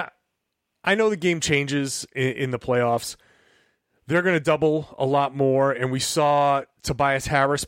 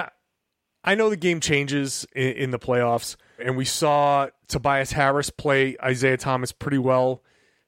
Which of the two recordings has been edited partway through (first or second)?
second